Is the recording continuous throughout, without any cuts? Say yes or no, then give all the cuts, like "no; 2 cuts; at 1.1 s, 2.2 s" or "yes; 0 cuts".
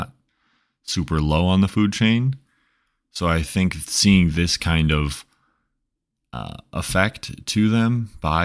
yes; 0 cuts